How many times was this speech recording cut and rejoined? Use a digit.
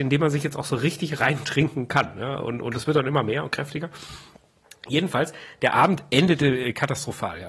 0